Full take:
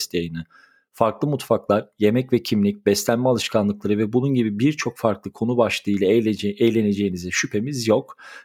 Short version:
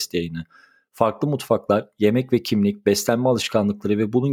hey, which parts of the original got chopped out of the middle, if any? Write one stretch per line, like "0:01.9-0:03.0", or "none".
none